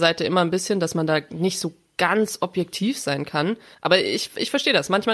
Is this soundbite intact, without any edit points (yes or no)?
no